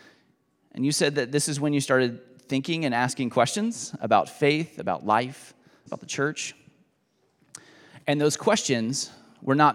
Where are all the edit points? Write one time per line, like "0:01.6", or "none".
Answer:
0:05.9